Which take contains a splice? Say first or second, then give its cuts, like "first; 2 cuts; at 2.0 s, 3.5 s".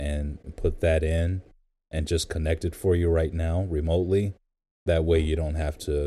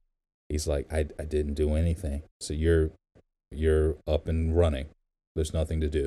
second; 1 cut; at 2.3 s